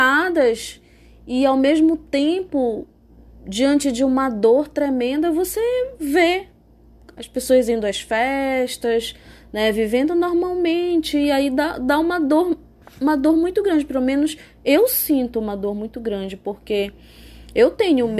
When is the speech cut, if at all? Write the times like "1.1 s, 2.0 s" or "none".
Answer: none